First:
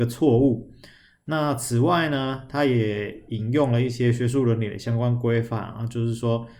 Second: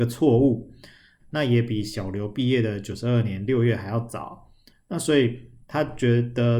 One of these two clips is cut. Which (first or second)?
second